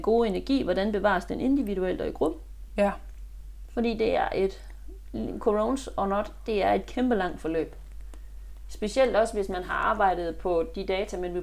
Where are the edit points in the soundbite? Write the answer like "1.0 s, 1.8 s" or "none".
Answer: none